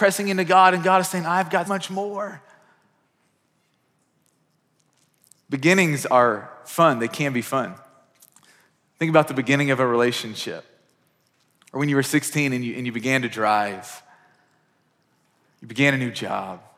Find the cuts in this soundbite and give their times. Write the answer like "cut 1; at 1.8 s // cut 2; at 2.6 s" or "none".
cut 1; at 1.7 s